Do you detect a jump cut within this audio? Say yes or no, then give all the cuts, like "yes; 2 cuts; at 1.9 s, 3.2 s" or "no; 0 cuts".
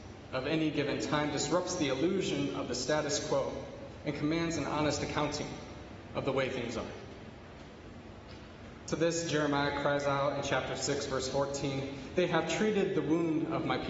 yes; 1 cut; at 8.8 s